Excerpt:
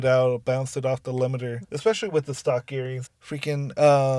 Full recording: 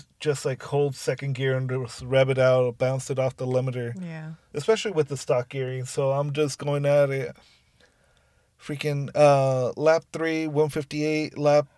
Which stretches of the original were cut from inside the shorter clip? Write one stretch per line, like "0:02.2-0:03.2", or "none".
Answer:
0:03.9-0:04.4
0:05.9-0:08.4